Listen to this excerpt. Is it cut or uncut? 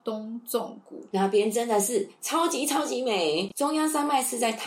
uncut